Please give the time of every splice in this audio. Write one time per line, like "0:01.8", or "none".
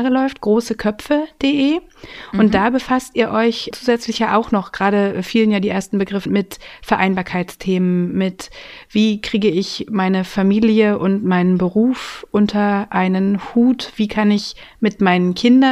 0:03.7
0:06.3
0:13.9